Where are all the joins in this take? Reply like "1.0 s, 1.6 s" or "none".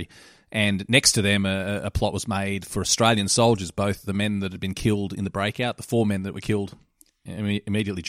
4.0 s